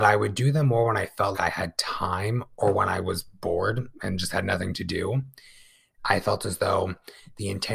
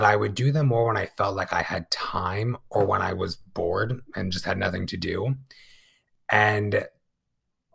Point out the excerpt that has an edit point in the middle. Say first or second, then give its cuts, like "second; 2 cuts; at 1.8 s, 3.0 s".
first; 2 cuts; at 1.3 s, 6.0 s